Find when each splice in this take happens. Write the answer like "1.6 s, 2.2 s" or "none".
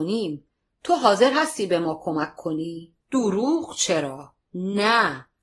3.0 s, 4.5 s